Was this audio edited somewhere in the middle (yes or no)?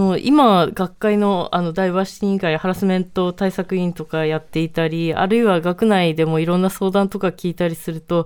no